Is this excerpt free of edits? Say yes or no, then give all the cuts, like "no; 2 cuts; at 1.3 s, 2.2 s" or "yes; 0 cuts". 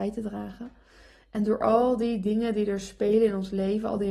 yes; 0 cuts